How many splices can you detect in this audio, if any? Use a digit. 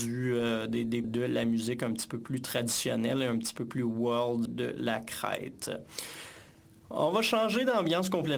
2